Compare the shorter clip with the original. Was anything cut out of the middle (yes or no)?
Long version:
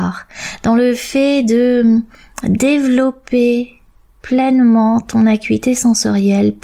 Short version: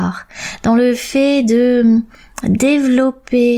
no